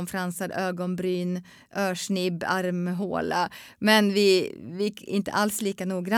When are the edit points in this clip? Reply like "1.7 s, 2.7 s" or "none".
none

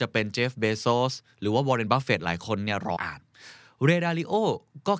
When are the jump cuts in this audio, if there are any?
3.0 s

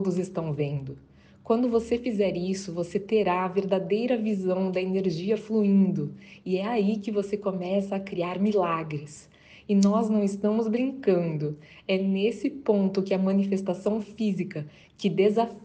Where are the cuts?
none

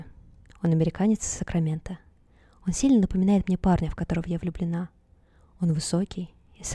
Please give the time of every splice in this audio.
none

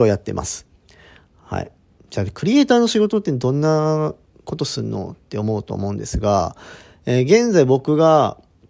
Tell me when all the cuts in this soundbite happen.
none

